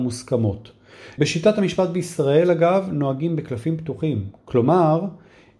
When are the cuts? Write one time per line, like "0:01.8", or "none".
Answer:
0:01.2